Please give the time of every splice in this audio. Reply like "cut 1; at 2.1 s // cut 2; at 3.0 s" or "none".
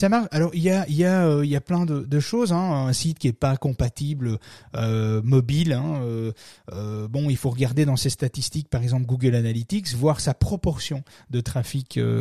none